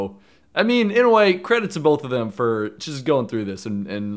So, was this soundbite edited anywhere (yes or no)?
no